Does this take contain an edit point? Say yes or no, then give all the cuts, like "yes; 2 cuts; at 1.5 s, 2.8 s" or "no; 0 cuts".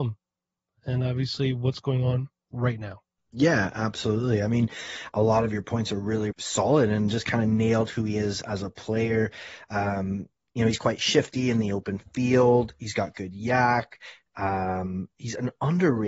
yes; 2 cuts; at 5.1 s, 6.3 s